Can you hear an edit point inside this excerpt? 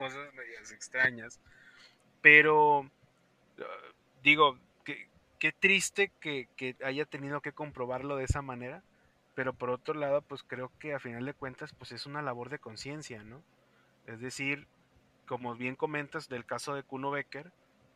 no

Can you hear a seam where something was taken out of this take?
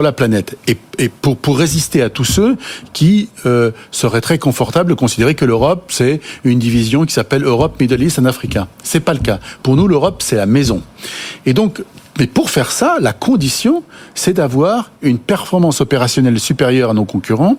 no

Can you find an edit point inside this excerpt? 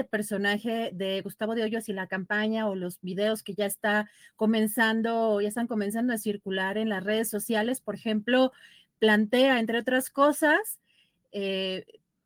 no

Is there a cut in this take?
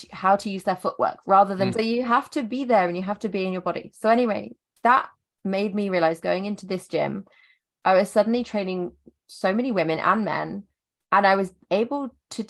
yes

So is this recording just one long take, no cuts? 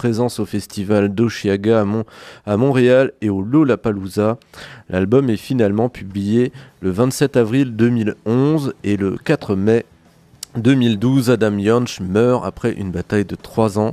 yes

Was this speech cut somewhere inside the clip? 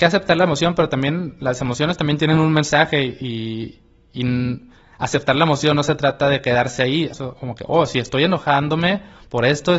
yes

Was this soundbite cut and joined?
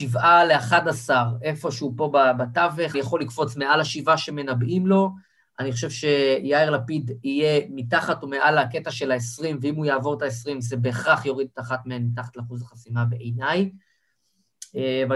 yes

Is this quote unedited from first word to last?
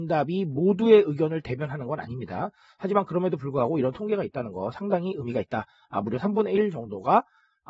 yes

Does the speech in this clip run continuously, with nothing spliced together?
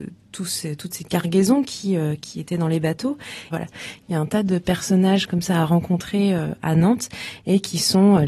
no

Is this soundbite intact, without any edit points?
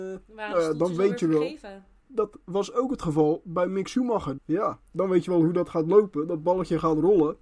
no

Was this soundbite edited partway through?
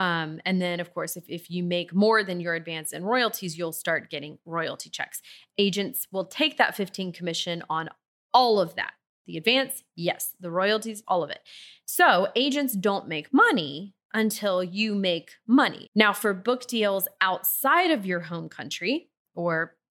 yes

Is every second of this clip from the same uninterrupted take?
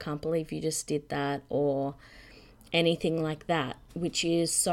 yes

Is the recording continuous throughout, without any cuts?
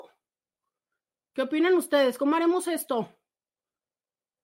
yes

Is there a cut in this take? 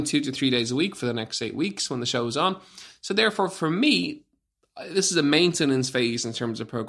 no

